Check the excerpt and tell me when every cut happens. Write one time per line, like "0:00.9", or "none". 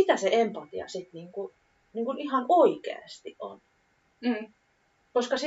none